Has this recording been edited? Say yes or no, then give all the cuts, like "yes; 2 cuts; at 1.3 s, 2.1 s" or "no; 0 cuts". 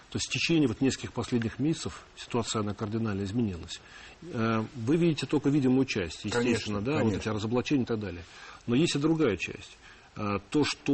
no; 0 cuts